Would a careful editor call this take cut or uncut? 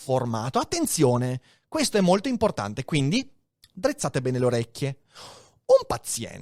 uncut